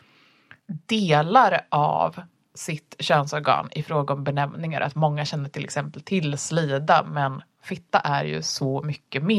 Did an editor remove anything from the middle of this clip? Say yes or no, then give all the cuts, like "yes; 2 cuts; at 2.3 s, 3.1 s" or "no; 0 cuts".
no; 0 cuts